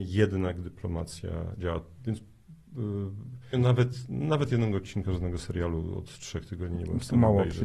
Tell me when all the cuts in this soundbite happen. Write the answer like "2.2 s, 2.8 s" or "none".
3.5 s

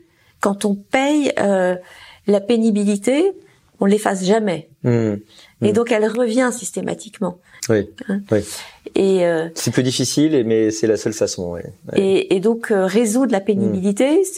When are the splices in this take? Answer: 7.6 s

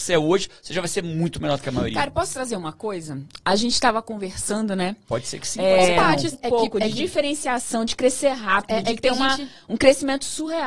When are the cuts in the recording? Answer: 6.3 s

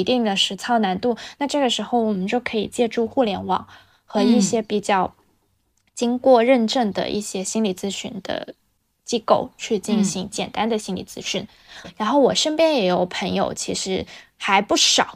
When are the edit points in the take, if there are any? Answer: 11.8 s

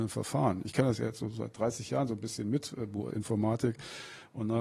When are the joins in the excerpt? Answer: 3.1 s

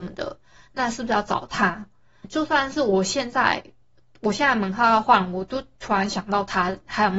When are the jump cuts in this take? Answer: 2.2 s

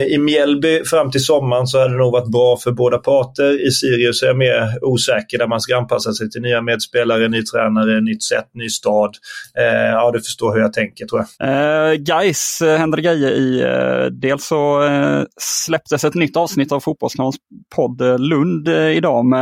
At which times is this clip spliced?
11.3 s

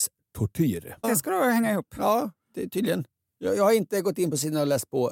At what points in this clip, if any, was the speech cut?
1.0 s

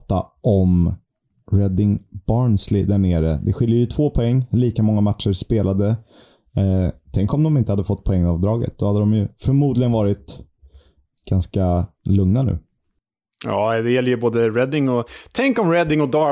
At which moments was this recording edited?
none

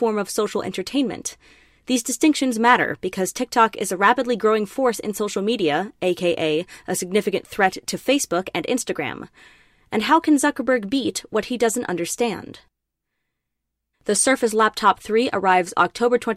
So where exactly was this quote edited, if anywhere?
13.9 s

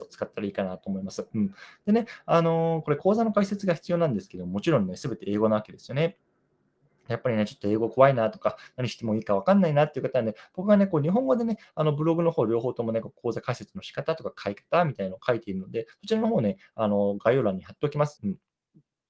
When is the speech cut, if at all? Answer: 18.2 s

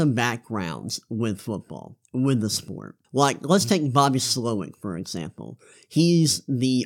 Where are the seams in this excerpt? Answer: 3.0 s

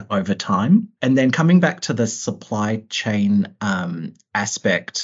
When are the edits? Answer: 1.0 s

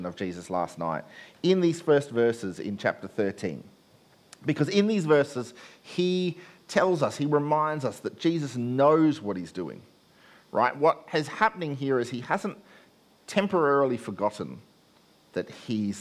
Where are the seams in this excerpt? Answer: none

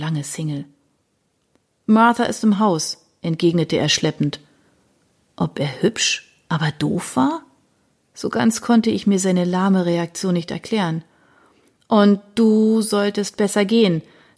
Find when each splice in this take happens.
none

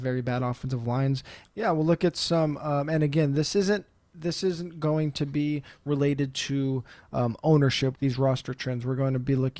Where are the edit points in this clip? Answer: 1.4 s, 7.9 s

